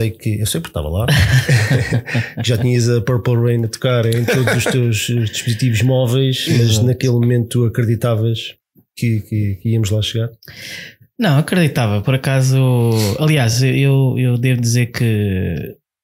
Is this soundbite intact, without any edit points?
yes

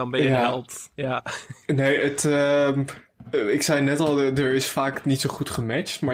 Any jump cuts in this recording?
no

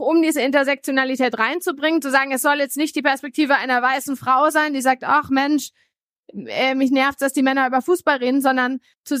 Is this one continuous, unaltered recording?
yes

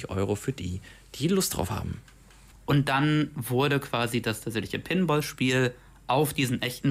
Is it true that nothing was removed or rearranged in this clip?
no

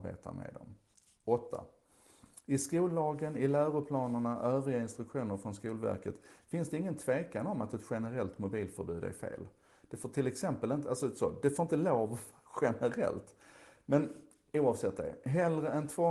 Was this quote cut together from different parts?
no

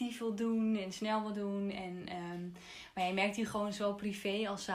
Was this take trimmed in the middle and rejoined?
no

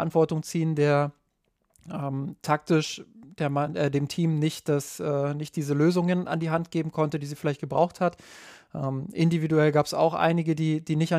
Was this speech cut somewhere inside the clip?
no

